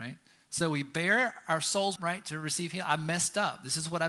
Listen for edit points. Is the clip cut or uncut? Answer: cut